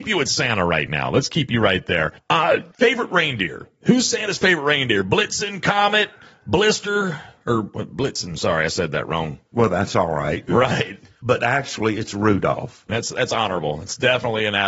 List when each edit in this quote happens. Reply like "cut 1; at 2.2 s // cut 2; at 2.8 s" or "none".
cut 1; at 10.5 s // cut 2; at 12.9 s

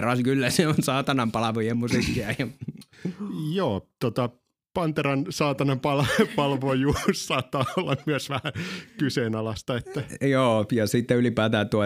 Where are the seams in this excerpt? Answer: none

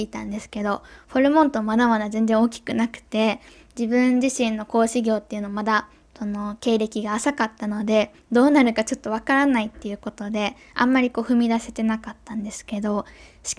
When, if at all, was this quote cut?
none

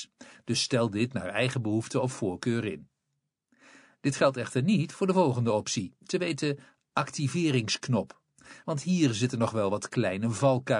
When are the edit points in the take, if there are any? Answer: none

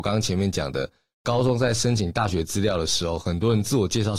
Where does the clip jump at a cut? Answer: none

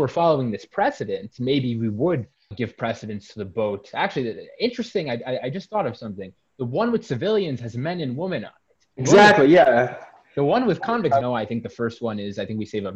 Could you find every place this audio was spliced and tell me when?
cut 1; at 2.5 s // cut 2; at 11.2 s

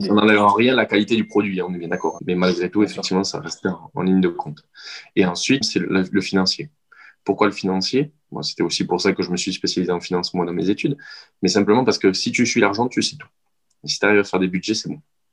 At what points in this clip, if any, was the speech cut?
cut 1; at 2.2 s // cut 2; at 5.6 s

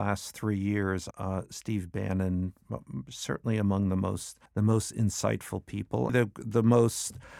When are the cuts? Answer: cut 1; at 1.1 s // cut 2; at 4.5 s // cut 3; at 6.1 s

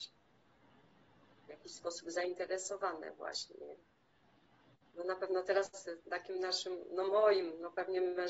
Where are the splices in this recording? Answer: cut 1; at 4.9 s

